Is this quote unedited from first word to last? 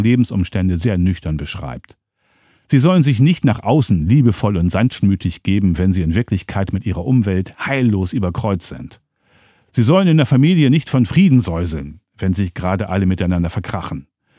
no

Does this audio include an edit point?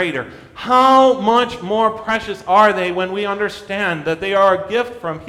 no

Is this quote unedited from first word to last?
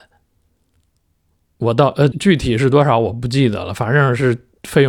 no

